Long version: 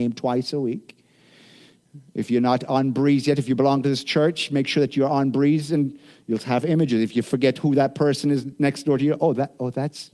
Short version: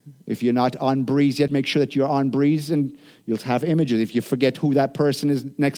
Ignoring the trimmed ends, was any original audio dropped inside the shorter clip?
yes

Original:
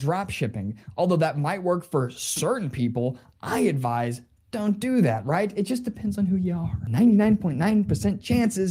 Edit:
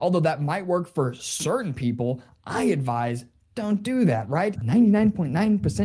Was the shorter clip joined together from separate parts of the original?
yes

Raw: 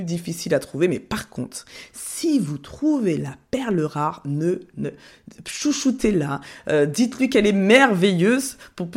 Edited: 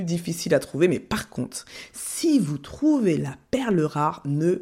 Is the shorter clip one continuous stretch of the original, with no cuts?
yes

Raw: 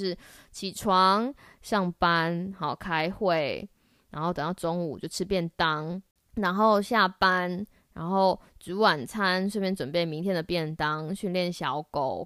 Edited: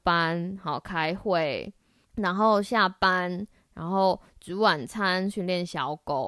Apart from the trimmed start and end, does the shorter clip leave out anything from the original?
yes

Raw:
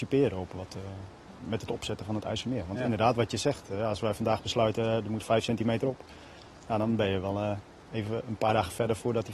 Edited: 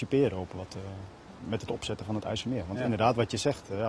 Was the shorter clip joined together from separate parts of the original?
no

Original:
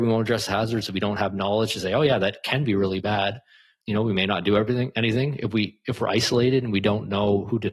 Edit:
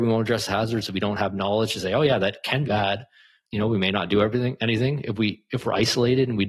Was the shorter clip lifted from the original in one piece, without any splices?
no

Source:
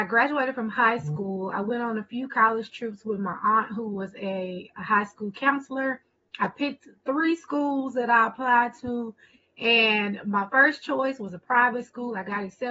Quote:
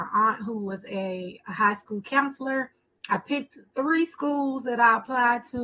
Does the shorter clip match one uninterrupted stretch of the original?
yes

